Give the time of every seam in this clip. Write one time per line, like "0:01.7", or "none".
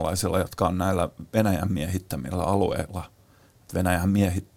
none